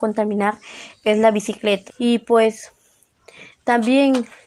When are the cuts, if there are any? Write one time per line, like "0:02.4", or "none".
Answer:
0:01.9

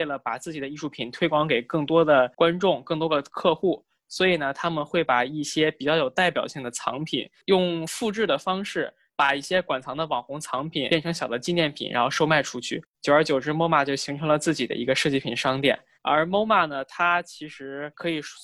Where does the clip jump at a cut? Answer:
0:15.9

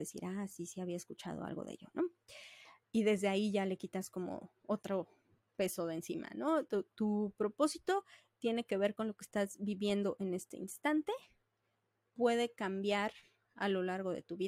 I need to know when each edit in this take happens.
0:02.8

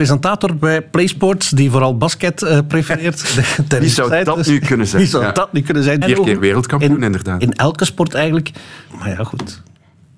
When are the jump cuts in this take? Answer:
0:06.0
0:08.9

